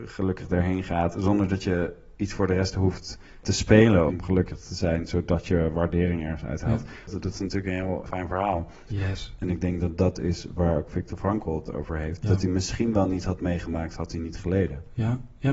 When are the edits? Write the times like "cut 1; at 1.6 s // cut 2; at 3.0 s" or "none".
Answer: cut 1; at 4.1 s // cut 2; at 8.9 s // cut 3; at 12.2 s